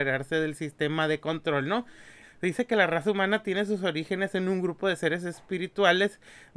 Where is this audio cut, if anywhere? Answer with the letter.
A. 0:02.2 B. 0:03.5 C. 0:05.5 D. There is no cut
A